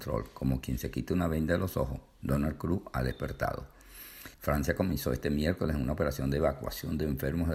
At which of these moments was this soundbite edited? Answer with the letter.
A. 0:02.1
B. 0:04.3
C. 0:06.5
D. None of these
B